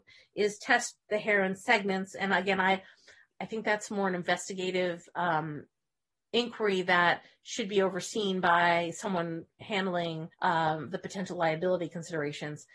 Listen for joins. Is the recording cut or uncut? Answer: cut